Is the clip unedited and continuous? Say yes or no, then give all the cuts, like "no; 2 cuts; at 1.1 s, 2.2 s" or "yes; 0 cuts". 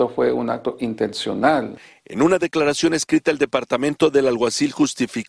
yes; 0 cuts